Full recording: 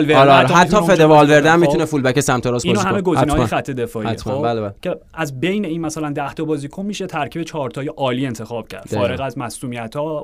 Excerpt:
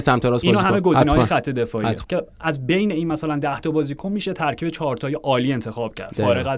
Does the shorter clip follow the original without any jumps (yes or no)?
no